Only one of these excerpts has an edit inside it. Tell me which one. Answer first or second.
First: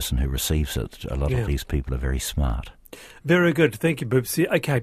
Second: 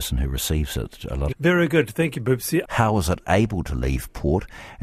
second